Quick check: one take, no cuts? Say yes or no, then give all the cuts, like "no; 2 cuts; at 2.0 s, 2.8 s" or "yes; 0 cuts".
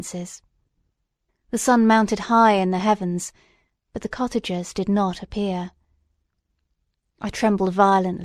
no; 1 cut; at 1.3 s